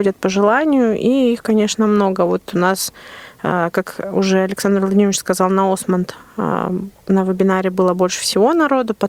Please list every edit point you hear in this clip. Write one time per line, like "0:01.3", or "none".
none